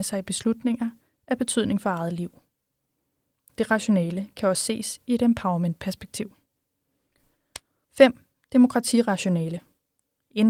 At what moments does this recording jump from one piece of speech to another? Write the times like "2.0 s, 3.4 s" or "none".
7.8 s